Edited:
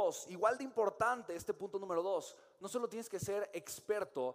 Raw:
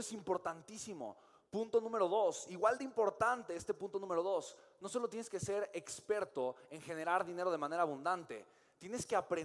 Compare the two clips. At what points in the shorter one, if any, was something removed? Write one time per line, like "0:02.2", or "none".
none